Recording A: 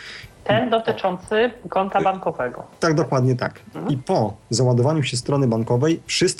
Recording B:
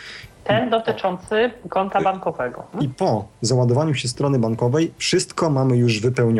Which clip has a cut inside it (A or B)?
B